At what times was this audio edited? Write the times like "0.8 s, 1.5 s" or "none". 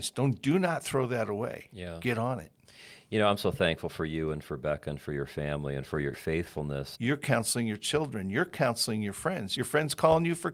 6.9 s